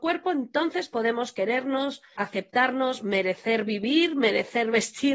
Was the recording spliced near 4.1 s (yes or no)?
no